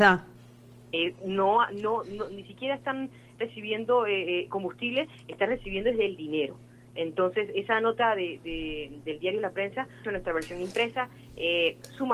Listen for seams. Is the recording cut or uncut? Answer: cut